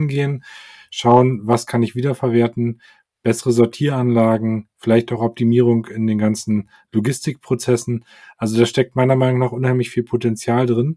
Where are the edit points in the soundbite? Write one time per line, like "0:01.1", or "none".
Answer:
none